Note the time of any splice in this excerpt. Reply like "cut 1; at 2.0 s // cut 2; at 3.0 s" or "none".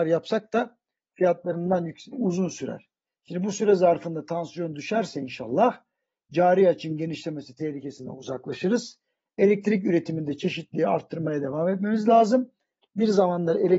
cut 1; at 2.1 s // cut 2; at 12.8 s